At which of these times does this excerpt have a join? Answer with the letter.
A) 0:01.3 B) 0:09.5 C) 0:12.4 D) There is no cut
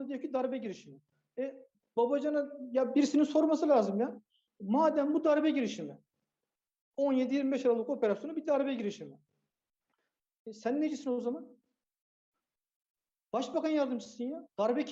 D